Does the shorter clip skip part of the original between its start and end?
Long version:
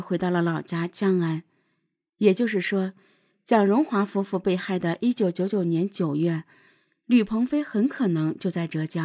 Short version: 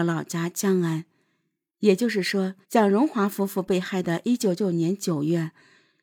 yes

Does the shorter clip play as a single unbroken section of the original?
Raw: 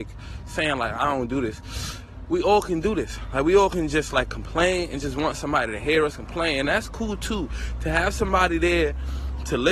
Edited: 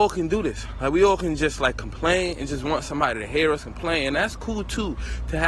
yes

